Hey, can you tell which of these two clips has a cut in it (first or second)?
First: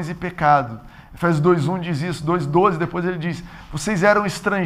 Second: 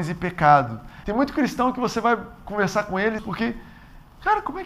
second